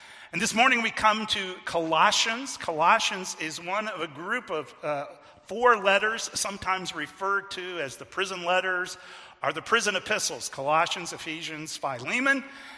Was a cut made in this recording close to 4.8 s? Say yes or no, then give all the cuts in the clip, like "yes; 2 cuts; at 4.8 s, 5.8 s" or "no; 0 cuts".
no; 1 cut; at 11.8 s